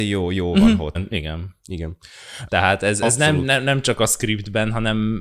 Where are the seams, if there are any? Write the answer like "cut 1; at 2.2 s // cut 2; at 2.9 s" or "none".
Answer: cut 1; at 0.9 s // cut 2; at 2.5 s